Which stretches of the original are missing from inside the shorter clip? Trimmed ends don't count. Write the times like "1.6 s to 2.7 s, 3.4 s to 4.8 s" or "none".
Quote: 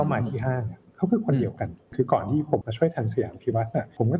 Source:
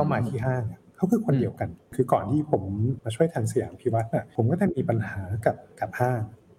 2.6 s to 3.0 s